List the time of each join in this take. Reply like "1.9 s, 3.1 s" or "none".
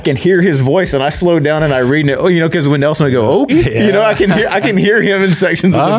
3.5 s